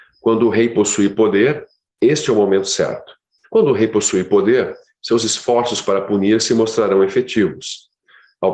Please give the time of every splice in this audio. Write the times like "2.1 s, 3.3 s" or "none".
3.4 s